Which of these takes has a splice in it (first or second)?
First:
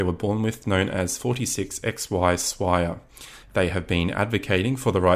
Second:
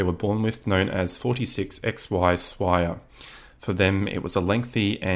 first